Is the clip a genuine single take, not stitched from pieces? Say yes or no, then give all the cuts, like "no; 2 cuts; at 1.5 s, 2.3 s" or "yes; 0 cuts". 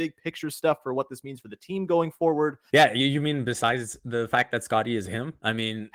no; 1 cut; at 2.7 s